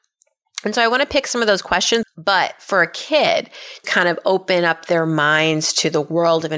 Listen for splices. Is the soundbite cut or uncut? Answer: cut